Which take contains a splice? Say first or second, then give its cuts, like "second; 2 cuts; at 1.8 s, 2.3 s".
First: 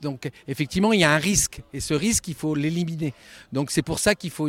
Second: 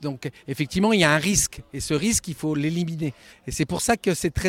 second; 1 cut; at 3.3 s